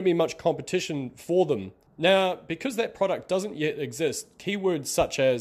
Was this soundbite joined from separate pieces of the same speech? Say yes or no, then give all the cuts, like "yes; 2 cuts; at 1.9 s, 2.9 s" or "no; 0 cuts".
yes; 1 cut; at 1.9 s